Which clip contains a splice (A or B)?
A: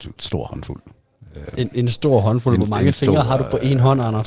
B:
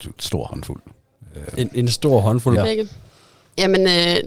B